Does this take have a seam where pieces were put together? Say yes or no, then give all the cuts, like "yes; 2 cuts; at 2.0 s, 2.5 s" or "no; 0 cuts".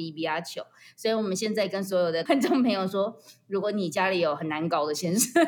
yes; 1 cut; at 2.3 s